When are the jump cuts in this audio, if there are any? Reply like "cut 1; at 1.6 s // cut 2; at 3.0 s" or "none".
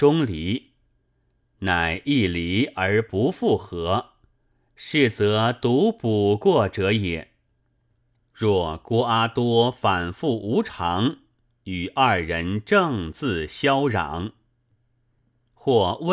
none